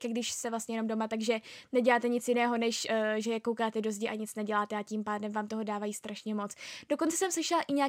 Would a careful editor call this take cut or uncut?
uncut